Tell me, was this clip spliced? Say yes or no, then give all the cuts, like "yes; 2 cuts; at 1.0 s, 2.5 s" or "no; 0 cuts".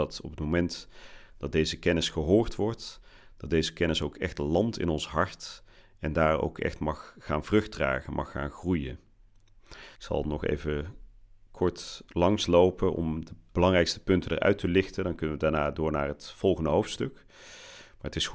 yes; 1 cut; at 10.0 s